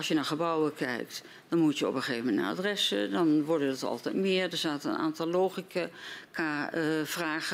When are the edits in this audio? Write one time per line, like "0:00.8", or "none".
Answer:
none